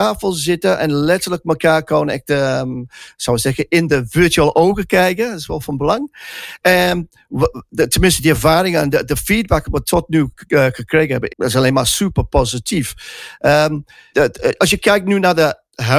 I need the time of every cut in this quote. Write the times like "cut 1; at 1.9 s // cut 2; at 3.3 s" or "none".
cut 1; at 11.3 s // cut 2; at 14.1 s